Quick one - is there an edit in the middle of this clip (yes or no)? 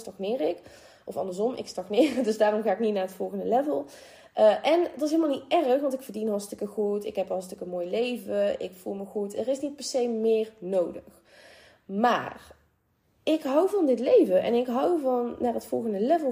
no